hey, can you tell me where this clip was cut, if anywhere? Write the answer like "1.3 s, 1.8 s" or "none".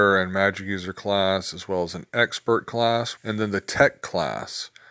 3.2 s